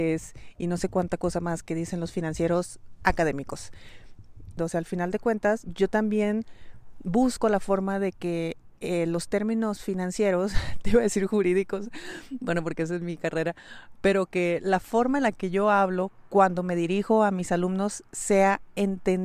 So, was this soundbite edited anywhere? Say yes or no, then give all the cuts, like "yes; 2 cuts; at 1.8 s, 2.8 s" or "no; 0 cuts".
yes; 1 cut; at 4.6 s